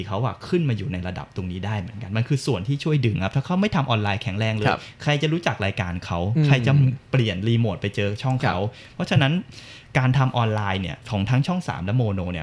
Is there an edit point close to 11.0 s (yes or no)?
yes